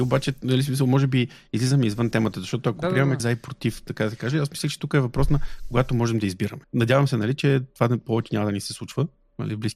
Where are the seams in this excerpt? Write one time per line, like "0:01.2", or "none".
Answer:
0:03.2
0:06.6